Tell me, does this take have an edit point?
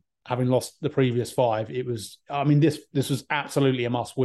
no; 0 cuts

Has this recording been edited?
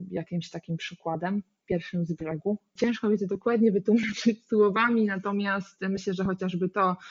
yes; 1 cut; at 2.8 s

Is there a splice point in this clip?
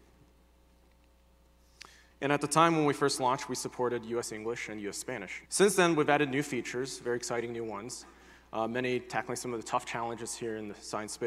yes; 2 cuts; at 2.1 s, 5.5 s

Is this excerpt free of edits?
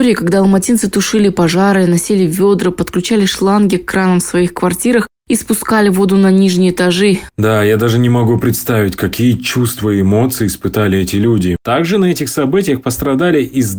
no; 2 cuts; at 7.3 s, 11.6 s

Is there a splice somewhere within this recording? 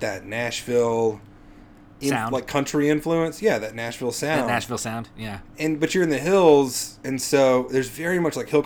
no; 0 cuts

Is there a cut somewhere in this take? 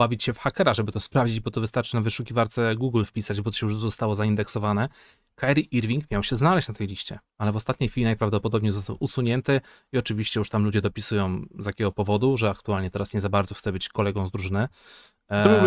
no; 0 cuts

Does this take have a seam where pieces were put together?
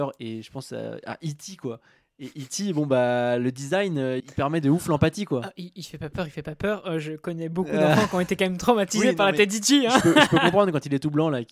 yes; 1 cut; at 4.2 s

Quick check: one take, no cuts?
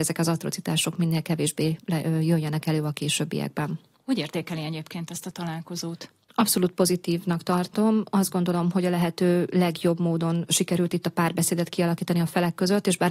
yes; 0 cuts

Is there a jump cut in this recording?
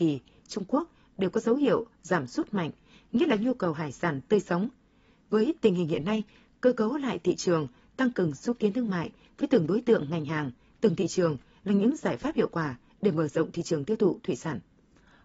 no; 0 cuts

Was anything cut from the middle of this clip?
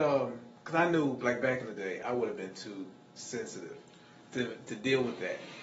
no; 0 cuts

